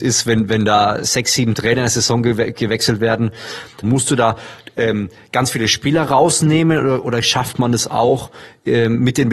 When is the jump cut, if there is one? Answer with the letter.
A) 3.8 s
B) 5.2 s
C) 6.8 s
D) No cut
A